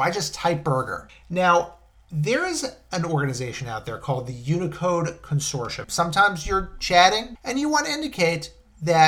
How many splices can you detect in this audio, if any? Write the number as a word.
three